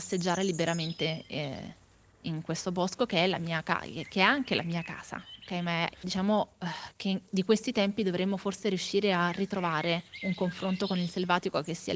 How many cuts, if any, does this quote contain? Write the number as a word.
one